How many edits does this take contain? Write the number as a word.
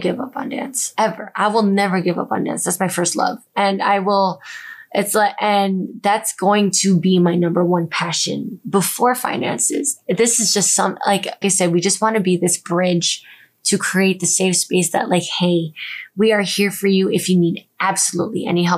one